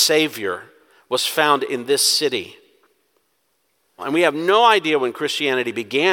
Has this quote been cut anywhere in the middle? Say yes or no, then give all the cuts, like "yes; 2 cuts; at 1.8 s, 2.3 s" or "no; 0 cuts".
yes; 1 cut; at 4.0 s